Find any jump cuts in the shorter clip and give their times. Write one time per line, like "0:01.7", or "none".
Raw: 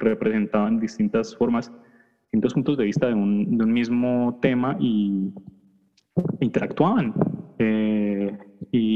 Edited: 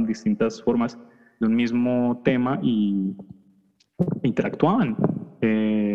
0:01.4